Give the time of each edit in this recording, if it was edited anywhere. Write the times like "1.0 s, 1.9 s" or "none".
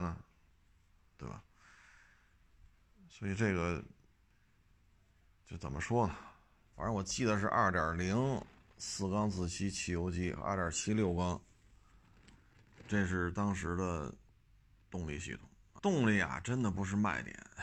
6.7 s, 15.8 s